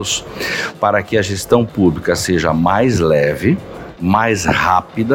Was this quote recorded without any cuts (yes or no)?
no